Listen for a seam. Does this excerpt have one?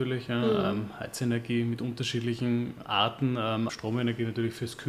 yes; 1 cut; at 3.7 s

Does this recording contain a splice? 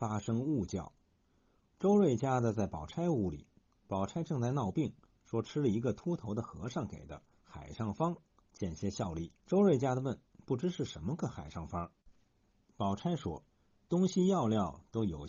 yes; 3 cuts; at 9.4 s, 12.0 s, 13.5 s

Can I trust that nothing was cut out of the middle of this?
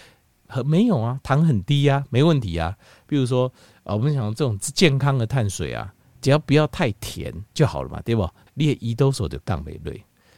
no; 2 cuts; at 3.1 s, 8.5 s

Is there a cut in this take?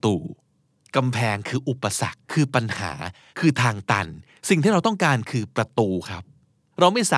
yes; 1 cut; at 2.2 s

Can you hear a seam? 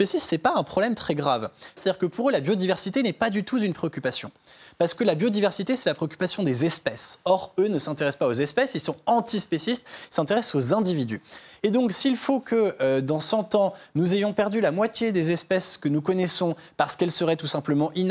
yes; 1 cut; at 1.8 s

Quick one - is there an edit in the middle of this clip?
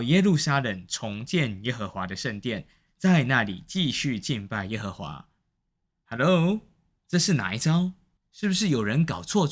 no; 0 cuts

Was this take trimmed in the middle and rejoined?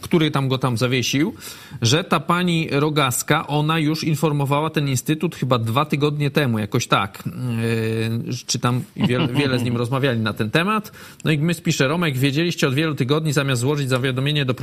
yes; 1 cut; at 8.9 s

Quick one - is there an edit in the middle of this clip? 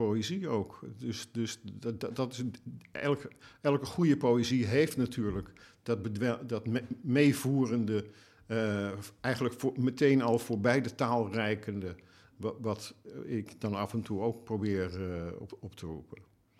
no; 0 cuts

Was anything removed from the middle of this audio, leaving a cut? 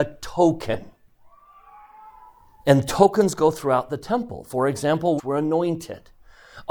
yes; 1 cut; at 5.2 s

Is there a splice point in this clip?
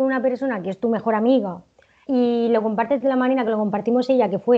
yes; 1 cut; at 2.1 s

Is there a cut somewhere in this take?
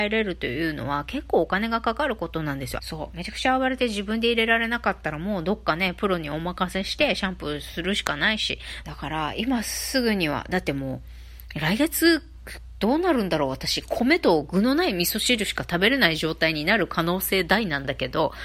yes; 2 cuts; at 2.8 s, 8.8 s

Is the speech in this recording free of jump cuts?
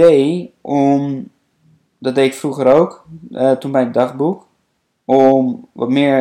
yes; 0 cuts

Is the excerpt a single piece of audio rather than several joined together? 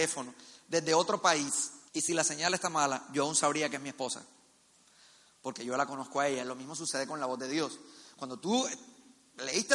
no; 1 cut; at 1.9 s

